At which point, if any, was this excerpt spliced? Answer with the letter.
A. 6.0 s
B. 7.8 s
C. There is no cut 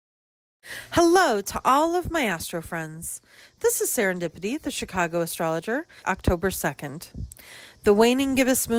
A